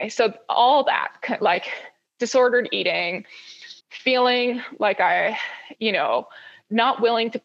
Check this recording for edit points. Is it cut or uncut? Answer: cut